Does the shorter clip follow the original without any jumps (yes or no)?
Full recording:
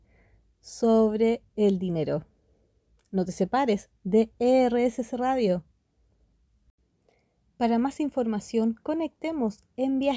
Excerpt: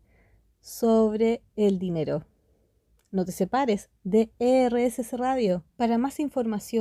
no